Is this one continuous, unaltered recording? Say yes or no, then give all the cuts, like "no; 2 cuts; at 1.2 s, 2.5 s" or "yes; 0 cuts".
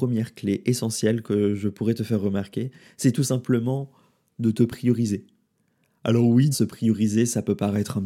no; 1 cut; at 6.5 s